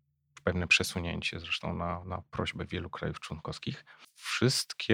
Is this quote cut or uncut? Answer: cut